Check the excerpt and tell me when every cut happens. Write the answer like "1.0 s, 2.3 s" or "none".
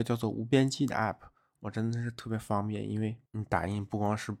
1.5 s